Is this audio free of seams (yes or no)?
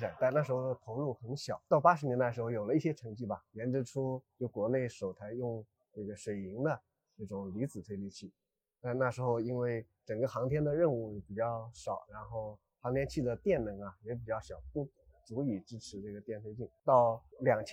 yes